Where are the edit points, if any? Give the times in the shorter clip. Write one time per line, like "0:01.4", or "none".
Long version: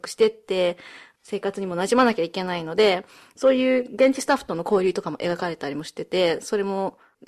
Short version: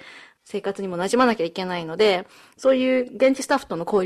none